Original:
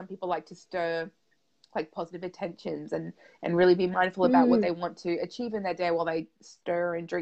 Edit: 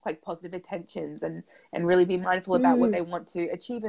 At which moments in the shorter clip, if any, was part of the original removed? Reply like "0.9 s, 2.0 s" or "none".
none